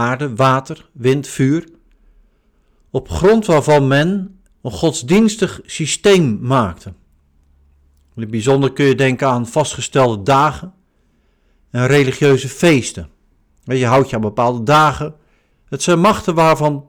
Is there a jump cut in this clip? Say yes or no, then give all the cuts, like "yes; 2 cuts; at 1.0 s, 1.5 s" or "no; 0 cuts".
yes; 3 cuts; at 4.5 s, 13.5 s, 15.5 s